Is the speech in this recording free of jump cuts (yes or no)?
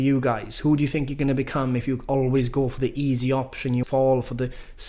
no